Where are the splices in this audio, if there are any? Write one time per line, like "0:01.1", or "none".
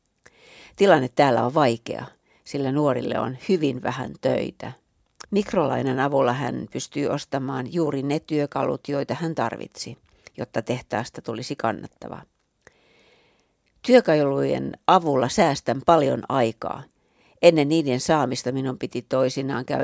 0:05.2